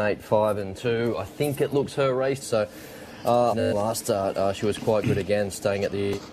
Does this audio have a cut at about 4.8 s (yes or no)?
no